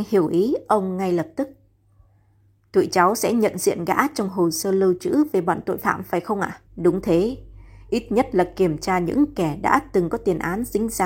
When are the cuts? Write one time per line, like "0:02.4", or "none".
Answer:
0:06.7